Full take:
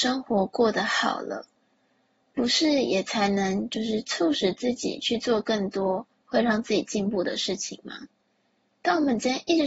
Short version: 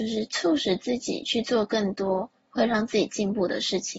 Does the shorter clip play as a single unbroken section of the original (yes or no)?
yes